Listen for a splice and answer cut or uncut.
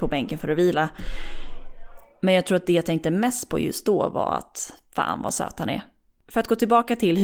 cut